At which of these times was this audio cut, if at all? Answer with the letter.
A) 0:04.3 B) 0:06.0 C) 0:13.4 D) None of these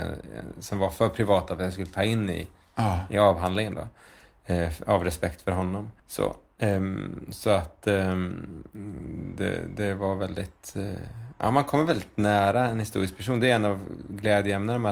B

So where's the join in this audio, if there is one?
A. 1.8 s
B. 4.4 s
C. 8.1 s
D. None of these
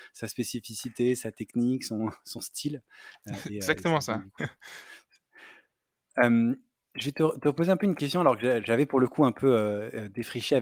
B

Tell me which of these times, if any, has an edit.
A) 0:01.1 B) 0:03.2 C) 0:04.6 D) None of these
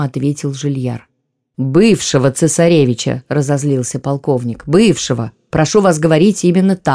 D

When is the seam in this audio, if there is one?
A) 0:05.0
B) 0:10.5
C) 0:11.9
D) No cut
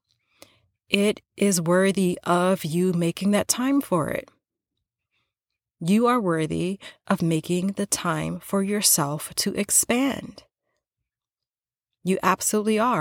D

